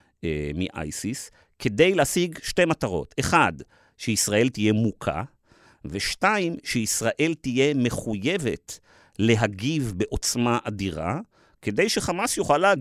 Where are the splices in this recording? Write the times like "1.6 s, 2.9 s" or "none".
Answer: none